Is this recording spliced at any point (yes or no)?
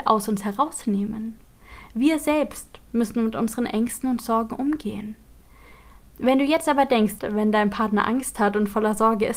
yes